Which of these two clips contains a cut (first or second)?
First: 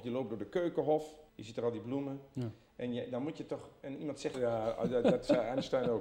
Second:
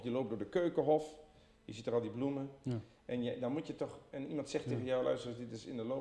first